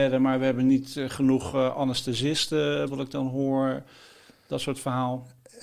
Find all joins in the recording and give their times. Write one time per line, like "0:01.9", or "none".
0:02.9